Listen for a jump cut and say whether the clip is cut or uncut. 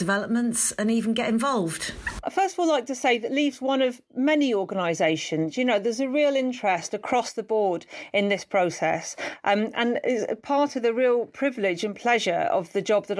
uncut